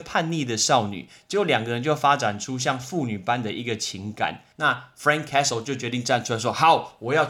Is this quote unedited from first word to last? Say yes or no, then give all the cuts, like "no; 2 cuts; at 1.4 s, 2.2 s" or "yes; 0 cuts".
no; 1 cut; at 4.5 s